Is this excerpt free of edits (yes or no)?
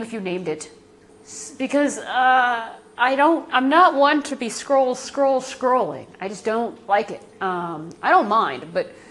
no